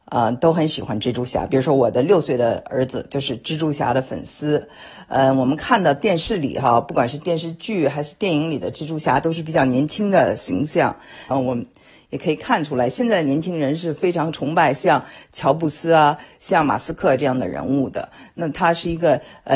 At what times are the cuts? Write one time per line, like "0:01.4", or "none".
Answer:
0:11.3